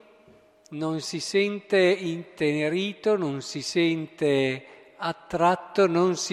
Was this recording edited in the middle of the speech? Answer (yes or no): no